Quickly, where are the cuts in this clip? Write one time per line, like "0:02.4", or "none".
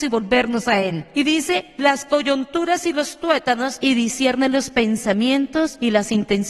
none

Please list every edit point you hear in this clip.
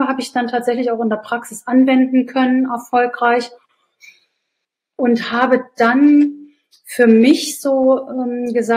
none

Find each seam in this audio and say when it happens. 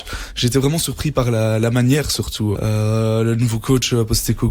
0:02.5

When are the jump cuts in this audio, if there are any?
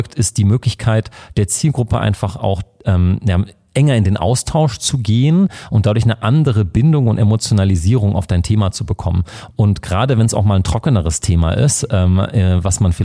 none

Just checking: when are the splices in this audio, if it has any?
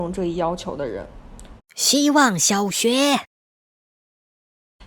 0:01.6

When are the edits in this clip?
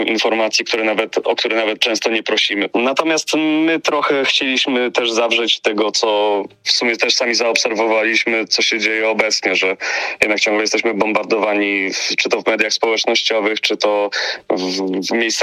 0:02.7

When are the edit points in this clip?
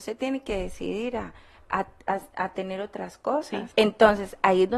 0:03.7

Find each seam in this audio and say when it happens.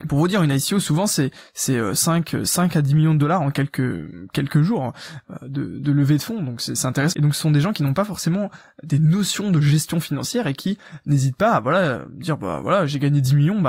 0:07.1

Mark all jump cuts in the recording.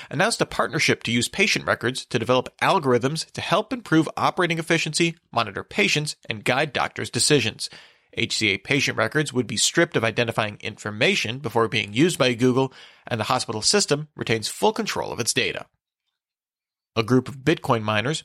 none

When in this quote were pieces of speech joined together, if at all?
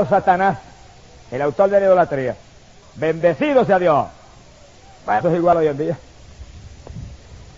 0:02.8
0:05.2

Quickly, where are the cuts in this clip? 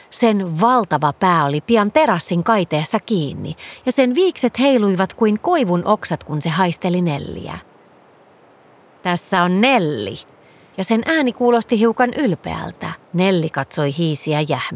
0:10.7
0:13.0

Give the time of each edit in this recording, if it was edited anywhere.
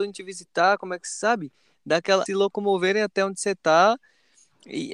0:02.3

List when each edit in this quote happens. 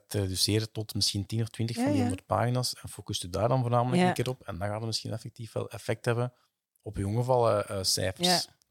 none

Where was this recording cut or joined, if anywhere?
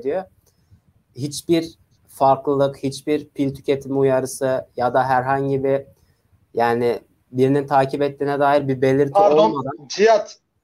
0:00.9

